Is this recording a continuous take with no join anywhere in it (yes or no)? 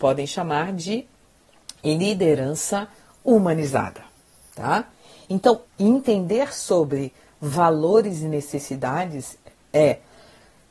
no